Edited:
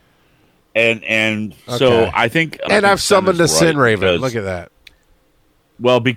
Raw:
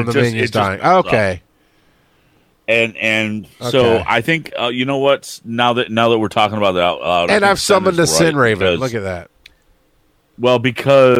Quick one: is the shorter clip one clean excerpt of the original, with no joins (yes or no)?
no